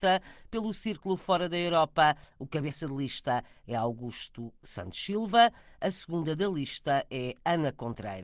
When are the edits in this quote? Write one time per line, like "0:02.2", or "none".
none